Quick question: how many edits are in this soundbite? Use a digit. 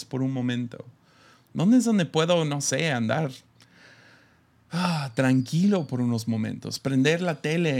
0